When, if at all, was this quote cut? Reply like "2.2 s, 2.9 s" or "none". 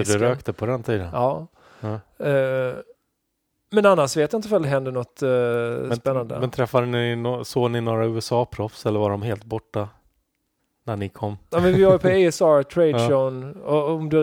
11.5 s